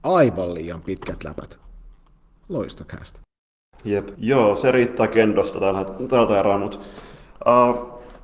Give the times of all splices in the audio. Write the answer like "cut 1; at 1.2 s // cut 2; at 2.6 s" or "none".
cut 1; at 4.1 s